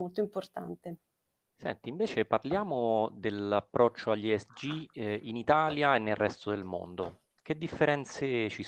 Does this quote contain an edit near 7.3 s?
no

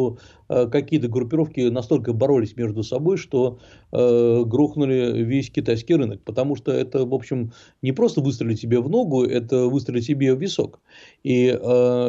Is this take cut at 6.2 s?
no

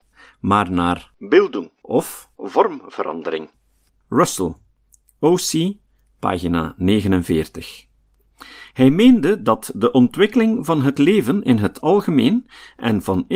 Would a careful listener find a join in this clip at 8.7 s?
no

